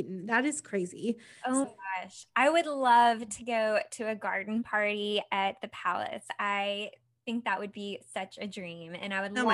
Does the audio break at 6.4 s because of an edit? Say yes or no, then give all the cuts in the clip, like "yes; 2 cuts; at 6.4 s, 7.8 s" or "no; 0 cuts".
no; 1 cut; at 1.6 s